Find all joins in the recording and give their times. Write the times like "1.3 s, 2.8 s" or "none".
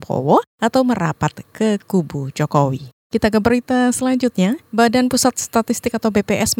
3.0 s